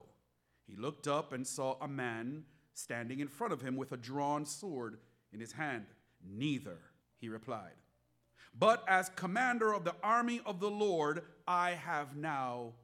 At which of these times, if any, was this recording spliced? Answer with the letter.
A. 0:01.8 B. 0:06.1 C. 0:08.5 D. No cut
B